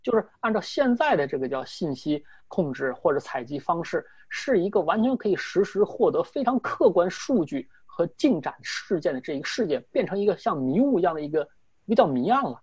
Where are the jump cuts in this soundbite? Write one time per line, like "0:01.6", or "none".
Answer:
none